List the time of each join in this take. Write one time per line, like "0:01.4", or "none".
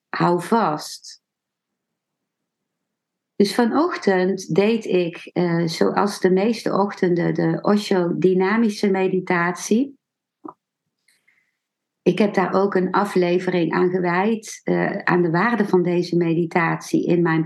none